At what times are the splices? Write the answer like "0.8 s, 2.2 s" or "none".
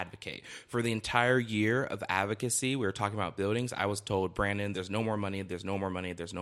none